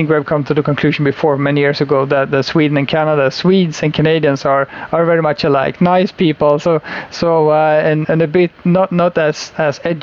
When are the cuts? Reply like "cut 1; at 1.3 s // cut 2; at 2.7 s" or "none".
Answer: cut 1; at 8.0 s